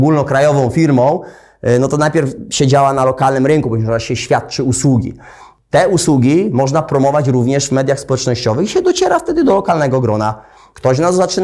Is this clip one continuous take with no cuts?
yes; 0 cuts

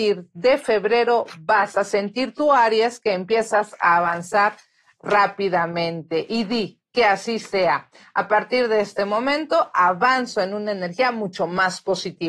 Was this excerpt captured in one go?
yes; 0 cuts

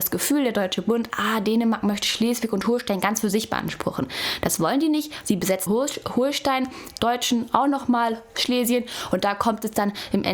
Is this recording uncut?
no; 2 cuts; at 5.7 s, 7.0 s

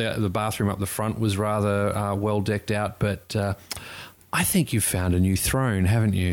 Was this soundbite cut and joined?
no; 0 cuts

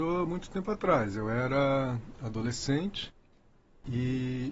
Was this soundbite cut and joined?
no; 0 cuts

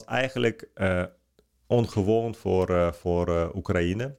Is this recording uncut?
yes; 0 cuts

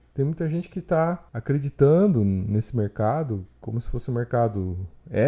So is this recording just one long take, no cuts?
no; 1 cut; at 1.3 s

